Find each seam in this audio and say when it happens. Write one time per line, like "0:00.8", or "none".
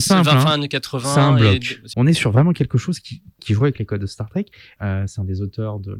0:01.9
0:03.4
0:04.8